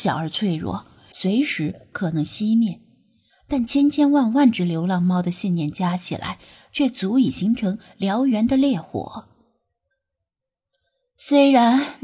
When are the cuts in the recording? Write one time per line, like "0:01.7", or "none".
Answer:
0:01.1